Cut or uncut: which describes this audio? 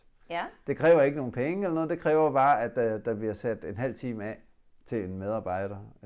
uncut